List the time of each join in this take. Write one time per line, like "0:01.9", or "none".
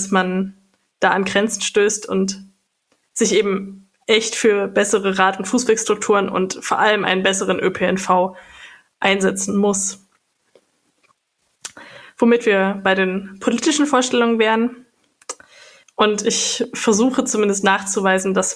0:15.8